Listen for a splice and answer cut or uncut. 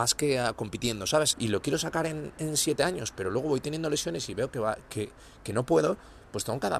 cut